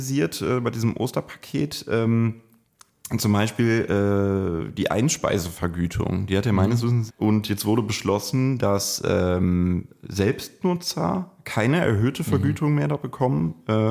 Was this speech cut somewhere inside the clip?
yes; 1 cut; at 7.1 s

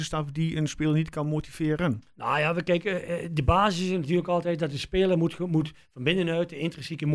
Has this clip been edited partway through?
no; 0 cuts

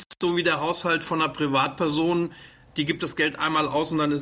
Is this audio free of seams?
yes; 0 cuts

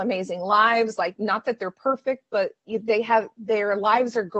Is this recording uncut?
yes; 0 cuts

